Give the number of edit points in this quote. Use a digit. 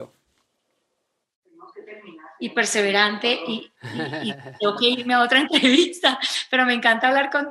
1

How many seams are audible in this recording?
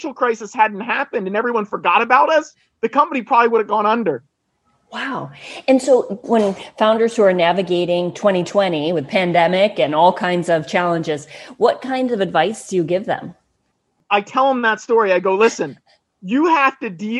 1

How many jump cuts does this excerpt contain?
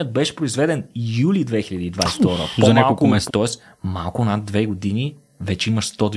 1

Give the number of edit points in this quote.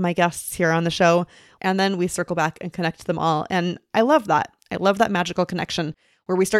1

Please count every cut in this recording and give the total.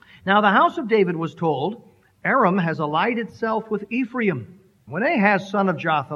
1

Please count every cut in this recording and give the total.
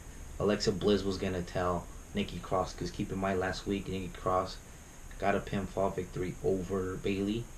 0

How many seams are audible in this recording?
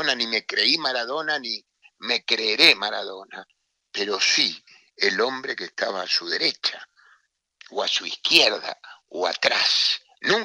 0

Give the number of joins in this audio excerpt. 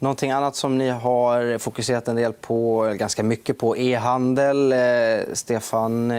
0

